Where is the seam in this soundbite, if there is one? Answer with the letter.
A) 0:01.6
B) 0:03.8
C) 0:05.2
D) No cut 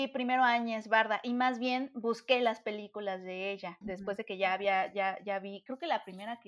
B